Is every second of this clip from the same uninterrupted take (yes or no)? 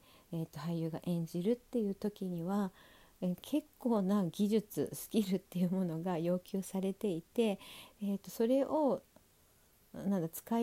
yes